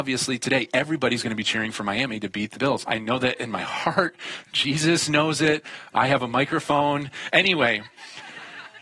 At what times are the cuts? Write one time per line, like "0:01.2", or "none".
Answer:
0:02.8